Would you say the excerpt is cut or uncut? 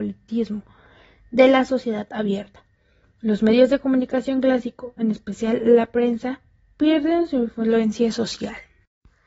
uncut